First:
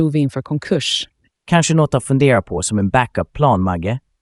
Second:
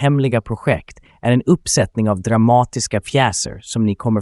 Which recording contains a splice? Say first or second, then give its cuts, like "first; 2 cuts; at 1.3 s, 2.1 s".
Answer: first; 1 cut; at 1.3 s